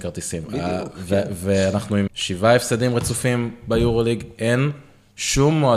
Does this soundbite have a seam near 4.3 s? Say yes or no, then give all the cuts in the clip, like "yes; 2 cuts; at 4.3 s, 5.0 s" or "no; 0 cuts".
no; 1 cut; at 2.1 s